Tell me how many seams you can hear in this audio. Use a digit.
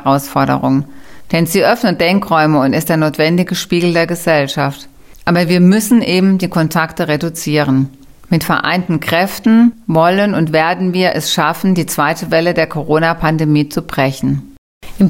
0